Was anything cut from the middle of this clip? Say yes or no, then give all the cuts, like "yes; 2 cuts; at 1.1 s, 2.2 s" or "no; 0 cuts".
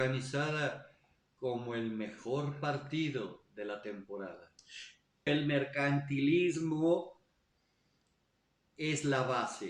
yes; 1 cut; at 5.3 s